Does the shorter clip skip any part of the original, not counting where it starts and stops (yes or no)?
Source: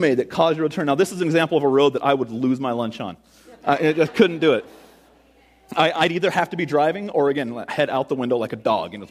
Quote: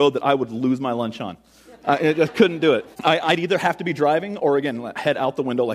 yes